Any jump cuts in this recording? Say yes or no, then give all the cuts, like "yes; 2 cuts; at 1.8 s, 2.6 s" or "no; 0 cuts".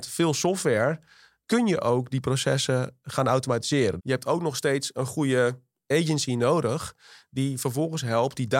yes; 1 cut; at 4.0 s